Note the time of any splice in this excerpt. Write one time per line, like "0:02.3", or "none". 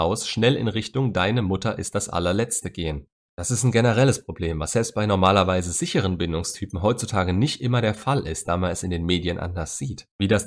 0:03.3